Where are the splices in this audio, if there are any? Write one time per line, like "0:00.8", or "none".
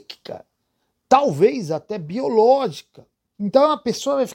0:03.3